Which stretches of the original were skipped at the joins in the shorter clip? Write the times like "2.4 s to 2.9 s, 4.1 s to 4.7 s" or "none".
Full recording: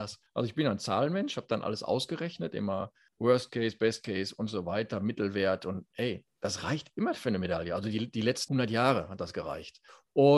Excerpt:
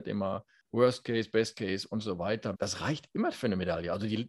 5.0 s to 6.3 s